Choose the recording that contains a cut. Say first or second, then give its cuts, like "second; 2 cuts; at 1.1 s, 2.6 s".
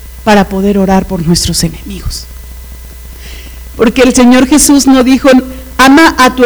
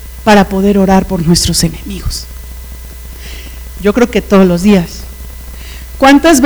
second; 1 cut; at 3.7 s